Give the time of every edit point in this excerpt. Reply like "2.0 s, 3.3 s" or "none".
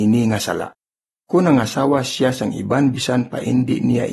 1.2 s